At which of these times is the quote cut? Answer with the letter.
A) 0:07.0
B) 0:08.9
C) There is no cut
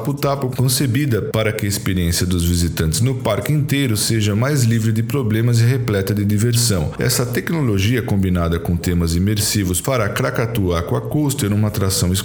A